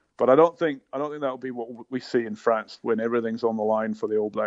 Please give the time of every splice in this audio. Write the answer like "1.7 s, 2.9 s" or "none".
none